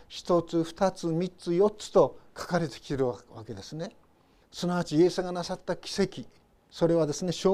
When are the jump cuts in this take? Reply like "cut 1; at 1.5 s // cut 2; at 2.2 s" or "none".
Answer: cut 1; at 4.4 s